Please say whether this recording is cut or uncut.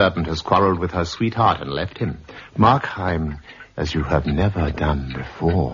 cut